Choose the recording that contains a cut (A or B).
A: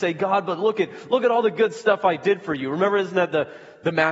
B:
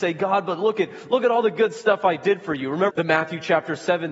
B